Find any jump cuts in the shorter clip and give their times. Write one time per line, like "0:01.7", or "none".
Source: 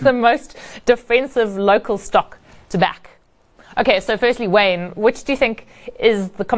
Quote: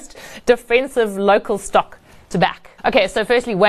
0:02.8

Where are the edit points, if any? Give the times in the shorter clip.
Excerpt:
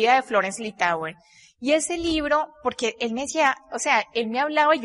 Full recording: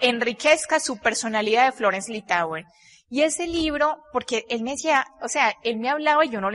none

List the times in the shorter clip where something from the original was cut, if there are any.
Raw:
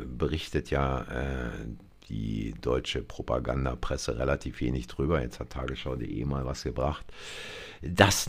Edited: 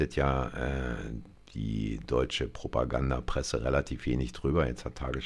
none

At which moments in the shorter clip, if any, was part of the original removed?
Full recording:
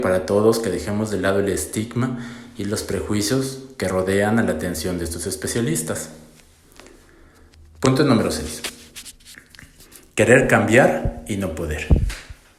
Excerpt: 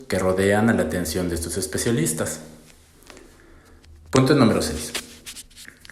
none

